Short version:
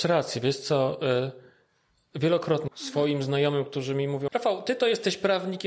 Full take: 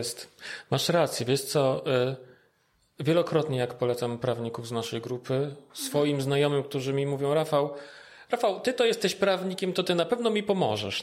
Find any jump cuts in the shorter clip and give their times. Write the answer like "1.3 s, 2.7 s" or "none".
2.7 s, 4.3 s